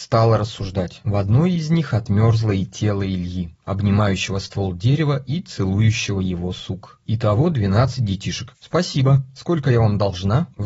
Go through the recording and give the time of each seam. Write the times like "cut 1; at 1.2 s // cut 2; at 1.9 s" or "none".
cut 1; at 1.0 s // cut 2; at 7.0 s // cut 3; at 8.5 s

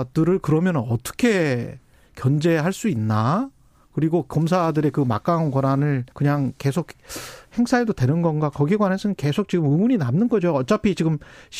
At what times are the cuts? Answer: cut 1; at 6.1 s

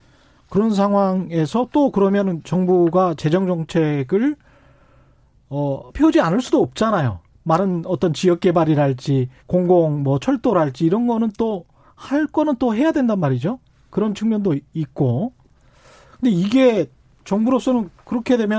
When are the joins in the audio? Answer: cut 1; at 5.9 s // cut 2; at 9.4 s

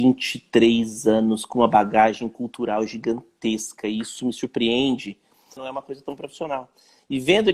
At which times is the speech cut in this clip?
cut 1; at 5.6 s

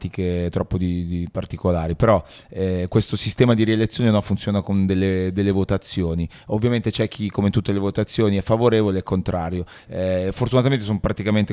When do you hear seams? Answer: none

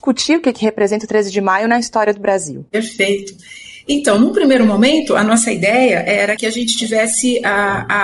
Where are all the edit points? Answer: cut 1; at 6.4 s

